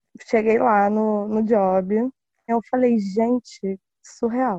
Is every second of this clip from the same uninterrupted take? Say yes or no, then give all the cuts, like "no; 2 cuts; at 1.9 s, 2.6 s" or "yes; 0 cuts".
no; 1 cut; at 2.5 s